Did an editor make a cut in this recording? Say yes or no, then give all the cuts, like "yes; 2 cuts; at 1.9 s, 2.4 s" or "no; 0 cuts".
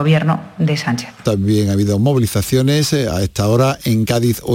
yes; 1 cut; at 1.2 s